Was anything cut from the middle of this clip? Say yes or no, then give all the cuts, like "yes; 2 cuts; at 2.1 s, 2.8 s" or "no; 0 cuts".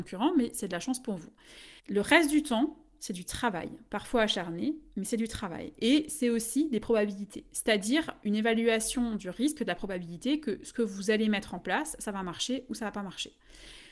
yes; 1 cut; at 1.8 s